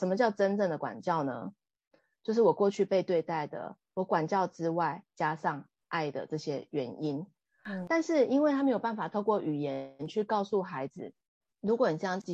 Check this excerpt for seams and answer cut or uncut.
uncut